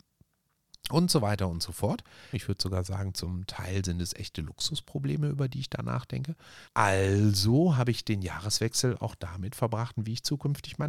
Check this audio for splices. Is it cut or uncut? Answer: cut